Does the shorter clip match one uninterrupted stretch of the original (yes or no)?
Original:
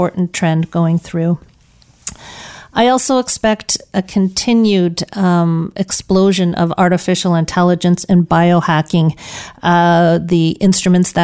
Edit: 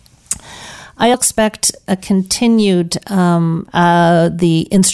no